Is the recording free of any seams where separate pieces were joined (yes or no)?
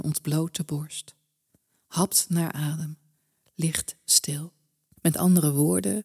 no